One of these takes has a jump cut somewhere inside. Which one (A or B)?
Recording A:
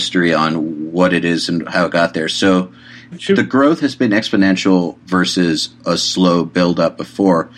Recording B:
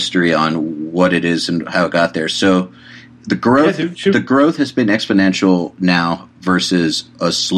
A